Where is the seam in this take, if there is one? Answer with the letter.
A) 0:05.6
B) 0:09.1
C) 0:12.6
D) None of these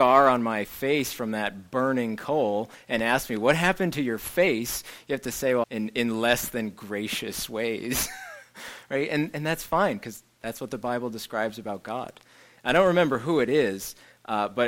A